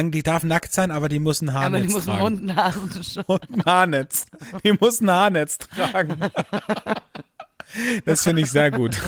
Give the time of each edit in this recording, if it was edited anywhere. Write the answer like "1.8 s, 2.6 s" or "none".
8.0 s